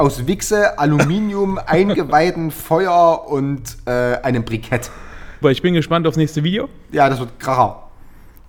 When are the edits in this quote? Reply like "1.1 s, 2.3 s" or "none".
5.4 s